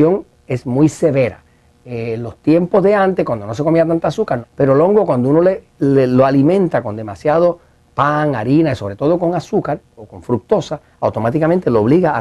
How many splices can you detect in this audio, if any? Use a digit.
1